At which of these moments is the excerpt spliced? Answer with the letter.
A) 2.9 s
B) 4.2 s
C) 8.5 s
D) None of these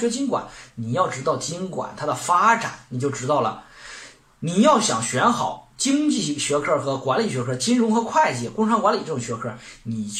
D